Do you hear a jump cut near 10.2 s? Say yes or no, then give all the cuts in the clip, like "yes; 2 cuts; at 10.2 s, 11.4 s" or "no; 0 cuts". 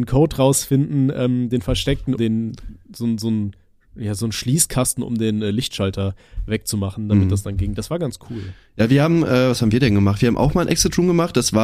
no; 1 cut; at 2.2 s